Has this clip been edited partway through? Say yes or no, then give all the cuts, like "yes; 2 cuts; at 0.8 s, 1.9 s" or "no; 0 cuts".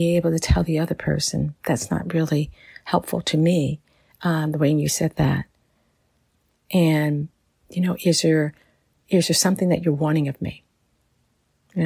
no; 0 cuts